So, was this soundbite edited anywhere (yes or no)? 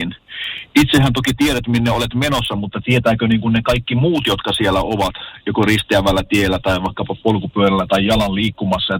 no